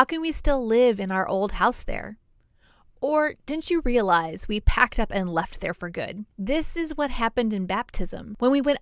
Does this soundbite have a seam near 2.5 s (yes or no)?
no